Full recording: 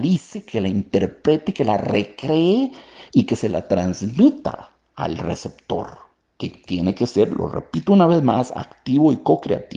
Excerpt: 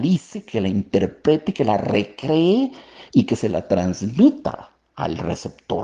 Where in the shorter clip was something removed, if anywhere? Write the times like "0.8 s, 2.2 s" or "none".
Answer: none